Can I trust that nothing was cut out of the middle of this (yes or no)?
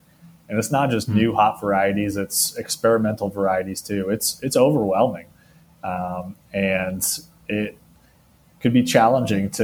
yes